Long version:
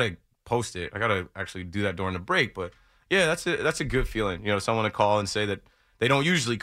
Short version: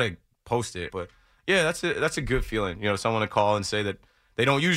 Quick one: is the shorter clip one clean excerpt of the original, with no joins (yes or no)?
no